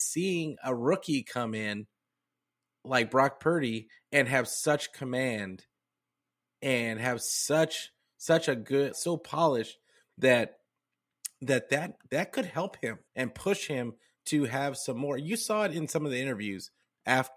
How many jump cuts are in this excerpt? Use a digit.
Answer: 2